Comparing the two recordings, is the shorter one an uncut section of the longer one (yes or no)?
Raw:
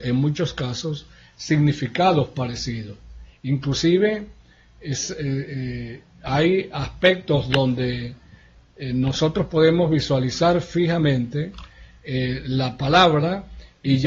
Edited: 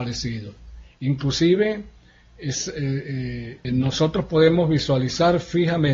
no